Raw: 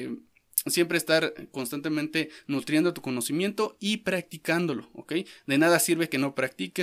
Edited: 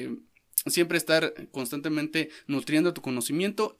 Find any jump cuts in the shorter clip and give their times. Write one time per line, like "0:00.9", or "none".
none